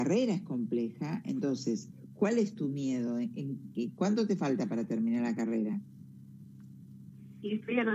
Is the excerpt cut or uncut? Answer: uncut